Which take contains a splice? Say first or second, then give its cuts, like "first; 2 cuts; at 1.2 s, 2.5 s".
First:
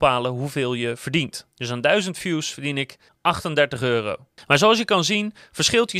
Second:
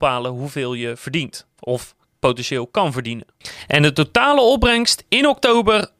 first; 2 cuts; at 1.5 s, 3.1 s